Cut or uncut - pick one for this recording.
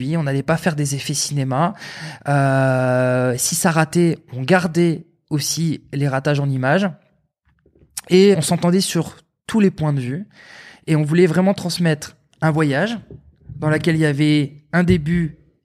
cut